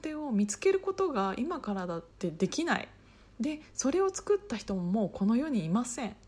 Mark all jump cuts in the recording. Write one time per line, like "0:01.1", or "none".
0:02.1